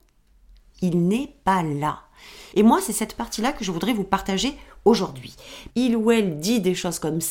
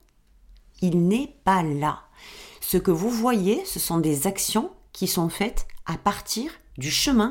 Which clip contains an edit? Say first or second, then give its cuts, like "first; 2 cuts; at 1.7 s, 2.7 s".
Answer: first; 2 cuts; at 2.5 s, 5.7 s